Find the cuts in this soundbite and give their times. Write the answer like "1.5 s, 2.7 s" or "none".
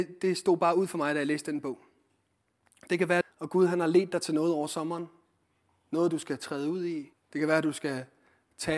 3.2 s, 7.1 s